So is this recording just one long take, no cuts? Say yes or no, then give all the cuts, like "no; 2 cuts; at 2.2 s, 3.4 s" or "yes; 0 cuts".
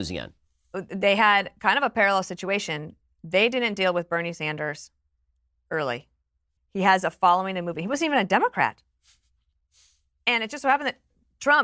no; 1 cut; at 6.6 s